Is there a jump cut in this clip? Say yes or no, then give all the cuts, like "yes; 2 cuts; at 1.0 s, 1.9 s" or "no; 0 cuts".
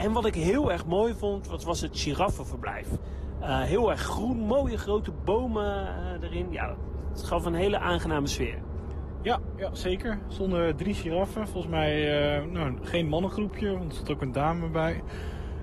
no; 0 cuts